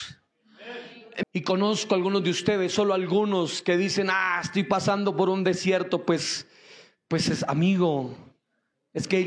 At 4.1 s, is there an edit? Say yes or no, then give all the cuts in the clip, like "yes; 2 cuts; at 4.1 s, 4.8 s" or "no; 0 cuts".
no; 1 cut; at 1.2 s